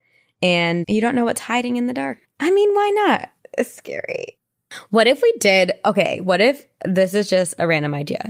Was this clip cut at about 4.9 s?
no; 1 cut; at 2.2 s

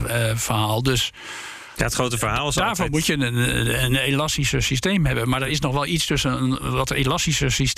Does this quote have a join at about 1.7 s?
no; 0 cuts

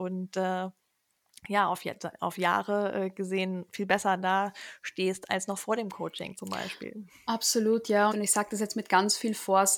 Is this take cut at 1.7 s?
no; 1 cut; at 8.1 s

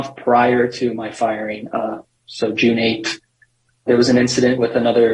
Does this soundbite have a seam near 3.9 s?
yes; 1 cut; at 3.9 s

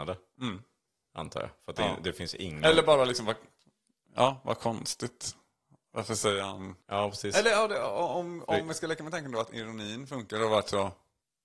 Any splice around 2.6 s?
no; 1 cut; at 6.8 s

